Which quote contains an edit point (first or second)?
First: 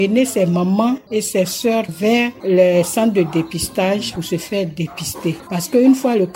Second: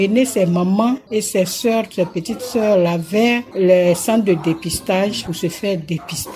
first